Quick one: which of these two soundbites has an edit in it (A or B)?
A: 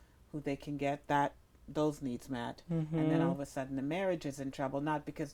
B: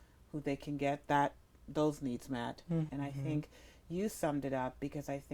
B